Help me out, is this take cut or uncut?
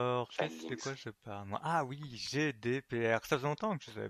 uncut